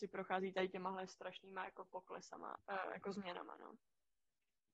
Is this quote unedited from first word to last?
no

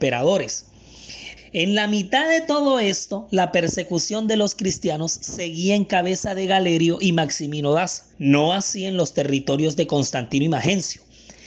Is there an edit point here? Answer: yes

